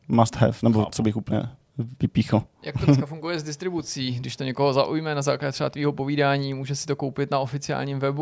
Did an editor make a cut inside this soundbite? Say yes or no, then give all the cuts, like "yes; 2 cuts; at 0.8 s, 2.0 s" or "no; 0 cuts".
no; 0 cuts